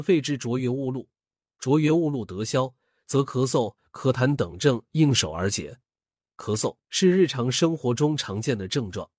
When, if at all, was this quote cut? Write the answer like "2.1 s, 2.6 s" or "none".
none